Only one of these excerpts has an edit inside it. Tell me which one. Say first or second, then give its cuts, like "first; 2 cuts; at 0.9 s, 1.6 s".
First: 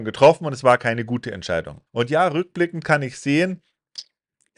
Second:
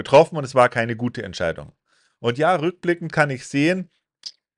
first; 1 cut; at 1.9 s